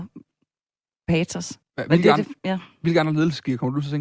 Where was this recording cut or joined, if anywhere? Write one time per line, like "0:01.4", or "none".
0:01.6